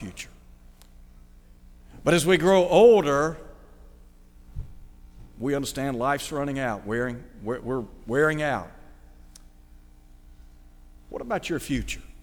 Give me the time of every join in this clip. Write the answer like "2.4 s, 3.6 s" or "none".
none